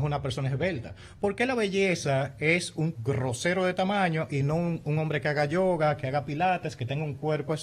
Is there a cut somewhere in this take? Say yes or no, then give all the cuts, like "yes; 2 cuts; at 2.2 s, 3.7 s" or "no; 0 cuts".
yes; 1 cut; at 3.0 s